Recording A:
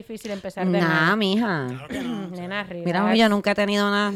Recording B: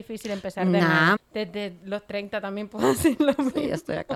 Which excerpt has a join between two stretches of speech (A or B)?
B